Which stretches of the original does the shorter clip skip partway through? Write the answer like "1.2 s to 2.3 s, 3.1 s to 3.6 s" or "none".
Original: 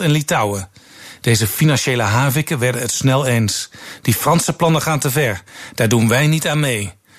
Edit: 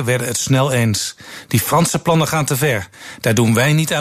none

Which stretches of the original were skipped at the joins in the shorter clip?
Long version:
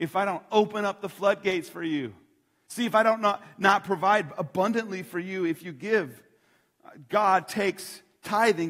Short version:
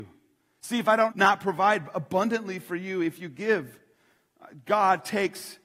3.2 s to 3.5 s

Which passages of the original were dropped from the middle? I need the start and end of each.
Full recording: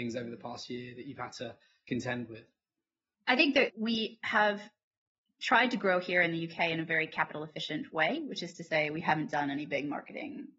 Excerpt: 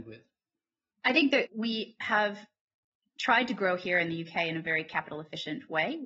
none

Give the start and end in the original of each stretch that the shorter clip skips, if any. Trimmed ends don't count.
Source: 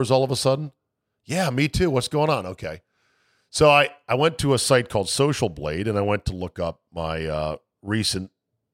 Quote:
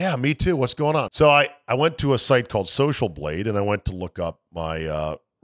2.4 s to 3.5 s

